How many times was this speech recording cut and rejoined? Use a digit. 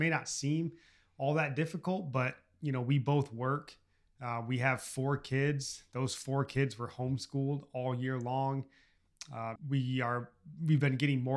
1